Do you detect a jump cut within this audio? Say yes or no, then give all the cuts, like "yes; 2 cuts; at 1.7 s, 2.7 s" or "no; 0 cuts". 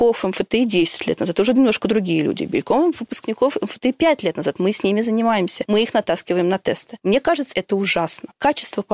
no; 0 cuts